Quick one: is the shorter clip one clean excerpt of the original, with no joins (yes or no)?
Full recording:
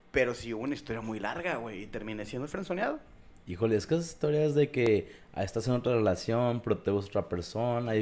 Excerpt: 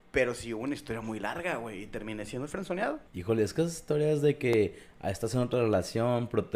no